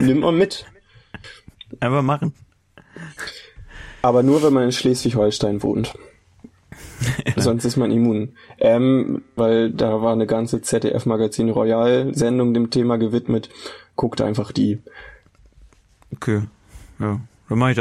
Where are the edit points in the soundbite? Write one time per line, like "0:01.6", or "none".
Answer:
0:07.4
0:09.4